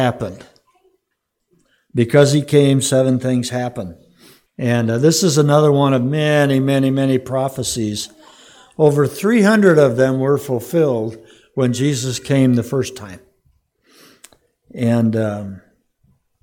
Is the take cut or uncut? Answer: cut